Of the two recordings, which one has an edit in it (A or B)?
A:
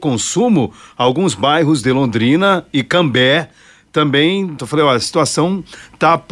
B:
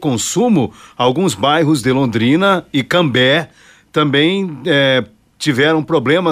A